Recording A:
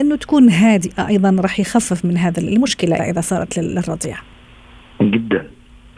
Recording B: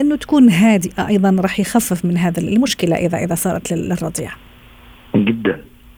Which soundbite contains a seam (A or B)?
A